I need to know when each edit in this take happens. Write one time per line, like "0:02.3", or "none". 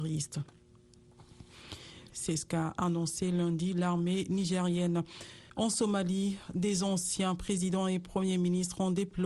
0:02.1
0:05.5